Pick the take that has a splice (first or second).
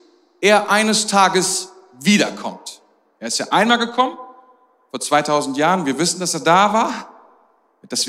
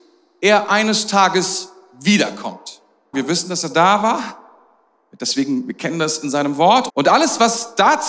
second